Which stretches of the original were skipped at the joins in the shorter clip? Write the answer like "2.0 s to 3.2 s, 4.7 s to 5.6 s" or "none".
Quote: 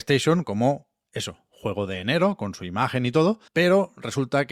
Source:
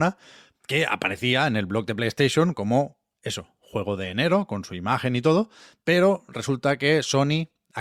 5.6 s to 5.8 s